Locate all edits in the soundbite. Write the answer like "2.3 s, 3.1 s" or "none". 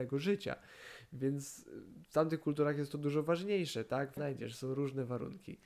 4.2 s